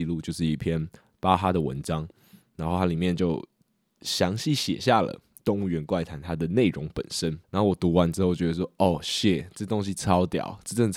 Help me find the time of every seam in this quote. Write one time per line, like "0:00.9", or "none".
0:07.4